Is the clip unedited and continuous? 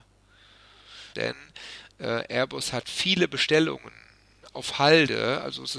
no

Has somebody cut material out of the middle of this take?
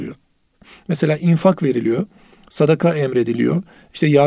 no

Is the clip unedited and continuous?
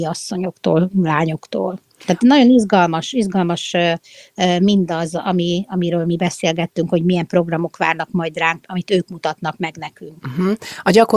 no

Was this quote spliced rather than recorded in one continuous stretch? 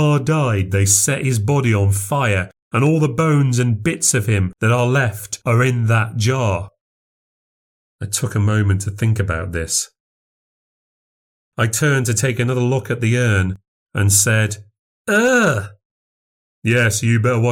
no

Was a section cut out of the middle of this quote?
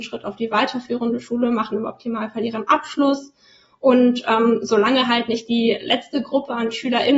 no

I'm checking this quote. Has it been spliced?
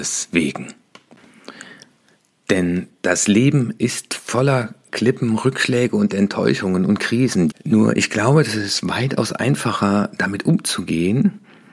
yes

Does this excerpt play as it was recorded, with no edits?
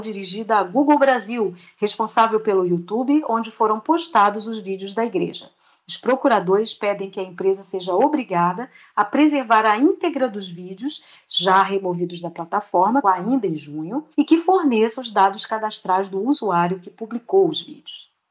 no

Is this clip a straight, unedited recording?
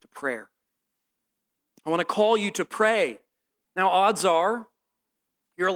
no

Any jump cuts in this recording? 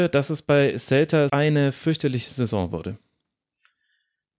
yes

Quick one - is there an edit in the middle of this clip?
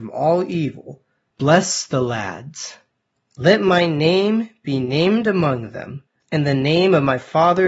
no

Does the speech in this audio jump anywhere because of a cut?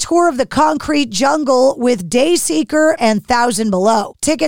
yes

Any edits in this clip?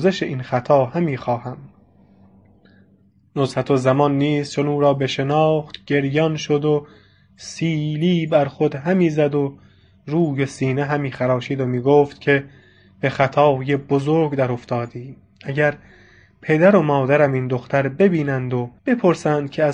yes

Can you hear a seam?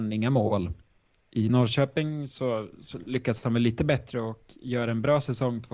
no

